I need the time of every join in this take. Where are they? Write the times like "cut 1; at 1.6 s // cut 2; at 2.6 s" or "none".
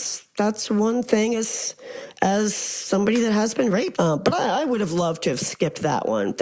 cut 1; at 3.9 s

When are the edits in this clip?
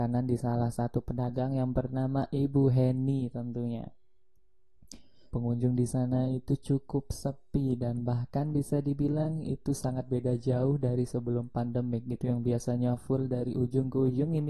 cut 1; at 5.3 s

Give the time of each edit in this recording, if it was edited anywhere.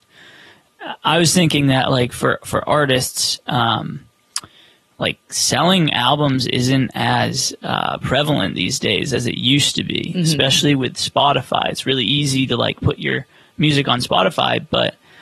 none

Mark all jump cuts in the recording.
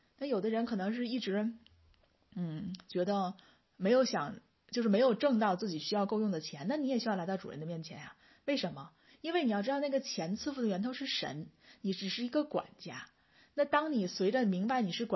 none

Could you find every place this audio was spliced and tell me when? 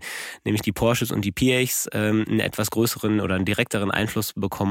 none

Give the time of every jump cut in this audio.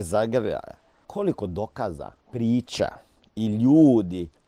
cut 1; at 1.0 s // cut 2; at 2.2 s

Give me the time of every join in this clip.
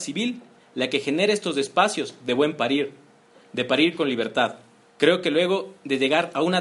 cut 1; at 4.9 s

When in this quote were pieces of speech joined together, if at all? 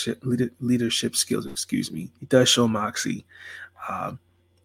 cut 1; at 2.2 s

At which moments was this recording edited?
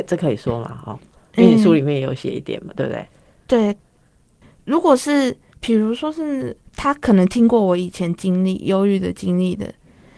cut 1; at 4.4 s // cut 2; at 6.7 s

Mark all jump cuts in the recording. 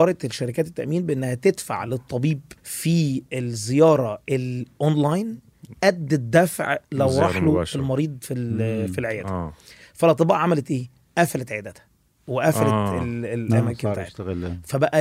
cut 1; at 2.6 s

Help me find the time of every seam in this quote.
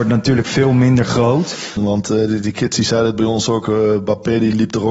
cut 1; at 1.8 s

